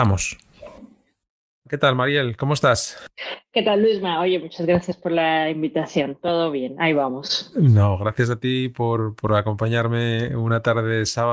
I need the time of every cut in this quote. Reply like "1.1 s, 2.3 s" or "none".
none